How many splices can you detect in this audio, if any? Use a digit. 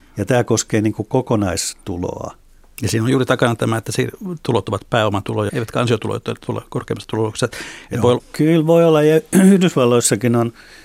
2